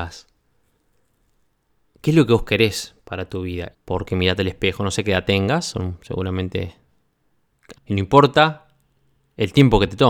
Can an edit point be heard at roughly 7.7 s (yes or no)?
yes